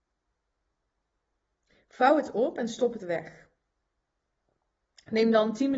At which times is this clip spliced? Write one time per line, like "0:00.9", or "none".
0:03.0